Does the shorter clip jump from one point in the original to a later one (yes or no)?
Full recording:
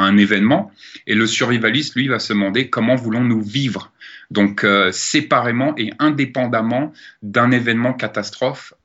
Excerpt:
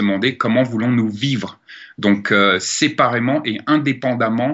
no